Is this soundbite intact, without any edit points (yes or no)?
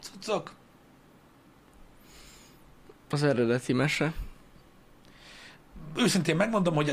yes